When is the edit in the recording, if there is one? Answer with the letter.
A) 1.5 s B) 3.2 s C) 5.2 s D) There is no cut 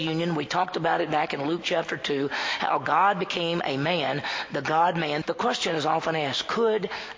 C